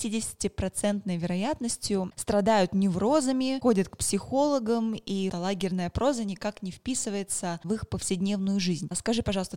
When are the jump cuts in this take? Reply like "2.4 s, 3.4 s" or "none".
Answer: 5.3 s